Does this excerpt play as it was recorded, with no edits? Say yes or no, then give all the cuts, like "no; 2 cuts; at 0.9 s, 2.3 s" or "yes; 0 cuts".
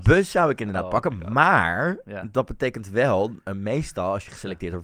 yes; 0 cuts